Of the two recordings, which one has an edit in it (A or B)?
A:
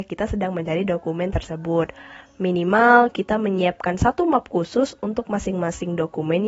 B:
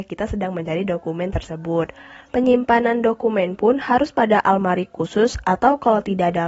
B